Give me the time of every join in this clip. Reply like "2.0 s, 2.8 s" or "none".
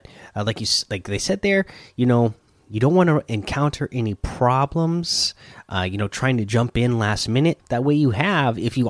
7.6 s